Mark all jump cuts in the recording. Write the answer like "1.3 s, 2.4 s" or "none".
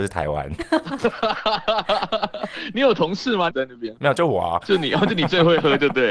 3.5 s

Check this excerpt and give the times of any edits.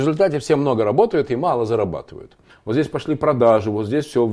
2.5 s

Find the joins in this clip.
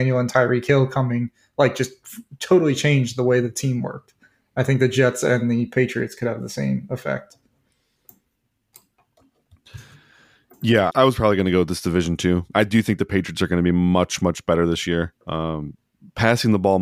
10.9 s, 12.5 s, 15.2 s

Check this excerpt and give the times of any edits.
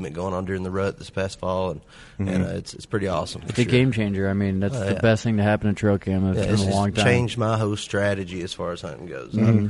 none

